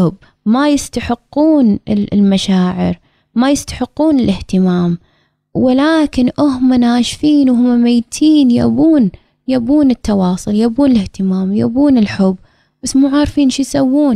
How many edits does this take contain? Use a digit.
0